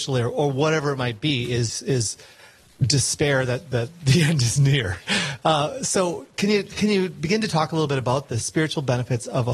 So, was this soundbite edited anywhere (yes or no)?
no